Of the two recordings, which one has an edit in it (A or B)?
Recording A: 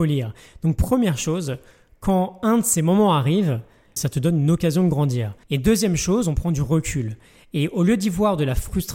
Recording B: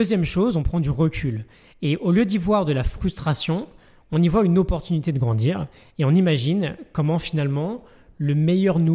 A